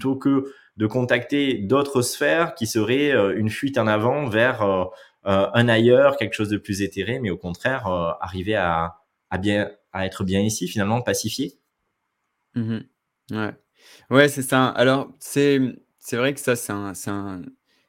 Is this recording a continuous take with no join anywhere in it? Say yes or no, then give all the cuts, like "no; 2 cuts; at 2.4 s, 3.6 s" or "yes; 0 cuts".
yes; 0 cuts